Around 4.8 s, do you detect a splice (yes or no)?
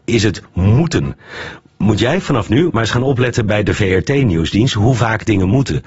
no